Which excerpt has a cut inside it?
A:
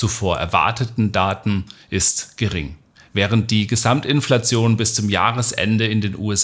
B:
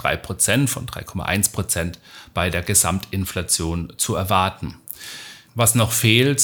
B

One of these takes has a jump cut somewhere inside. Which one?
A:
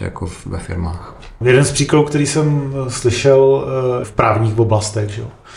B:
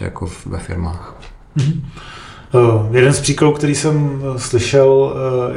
A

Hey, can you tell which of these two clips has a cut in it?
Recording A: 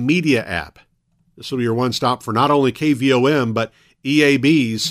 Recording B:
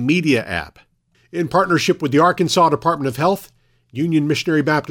B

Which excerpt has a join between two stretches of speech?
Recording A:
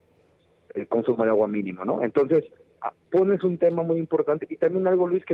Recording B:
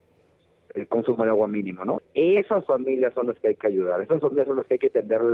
B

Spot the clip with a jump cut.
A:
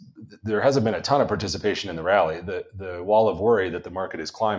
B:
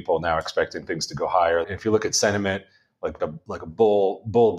B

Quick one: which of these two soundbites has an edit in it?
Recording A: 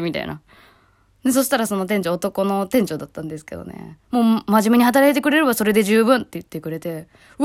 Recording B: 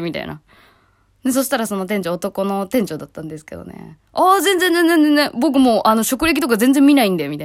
A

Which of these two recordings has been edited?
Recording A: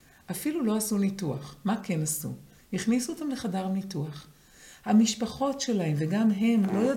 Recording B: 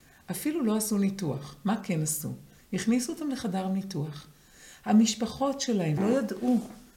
B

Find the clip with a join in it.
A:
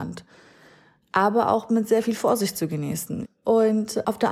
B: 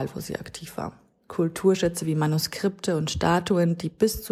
A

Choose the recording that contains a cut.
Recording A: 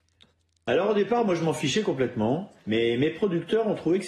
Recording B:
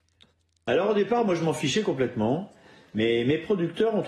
A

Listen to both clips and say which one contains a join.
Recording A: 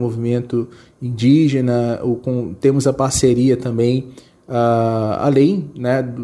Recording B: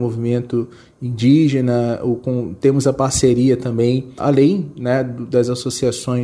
B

